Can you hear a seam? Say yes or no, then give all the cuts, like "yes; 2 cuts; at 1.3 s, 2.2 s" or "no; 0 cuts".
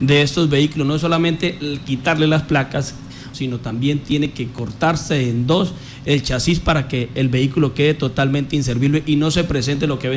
yes; 1 cut; at 3.3 s